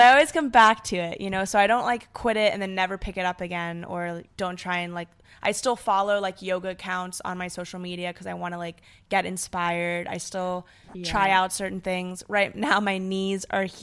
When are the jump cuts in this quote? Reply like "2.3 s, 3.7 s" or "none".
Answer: 4.3 s